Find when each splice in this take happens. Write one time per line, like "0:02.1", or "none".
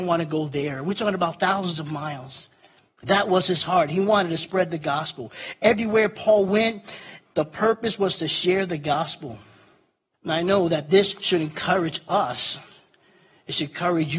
none